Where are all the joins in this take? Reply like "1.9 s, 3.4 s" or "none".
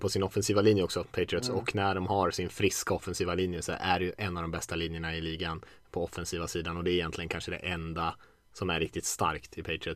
none